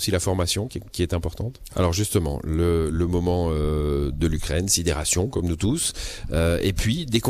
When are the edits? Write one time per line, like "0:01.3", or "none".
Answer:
0:01.7